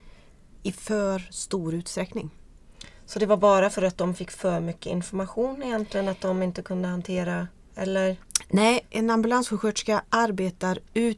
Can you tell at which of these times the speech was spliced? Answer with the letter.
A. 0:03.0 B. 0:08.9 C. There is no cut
B